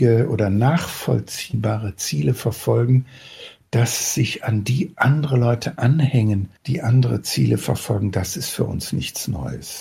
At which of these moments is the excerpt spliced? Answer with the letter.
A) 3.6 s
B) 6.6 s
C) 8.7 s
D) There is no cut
B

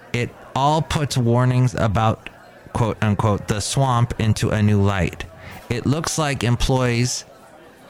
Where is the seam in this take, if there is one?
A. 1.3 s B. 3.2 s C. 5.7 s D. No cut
D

